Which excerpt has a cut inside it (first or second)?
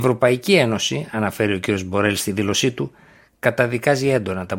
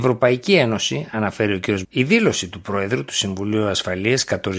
second